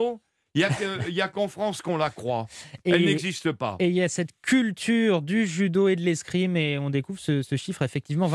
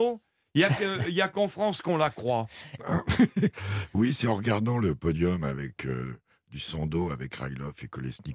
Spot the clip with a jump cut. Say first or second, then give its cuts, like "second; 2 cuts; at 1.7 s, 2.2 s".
second; 1 cut; at 2.8 s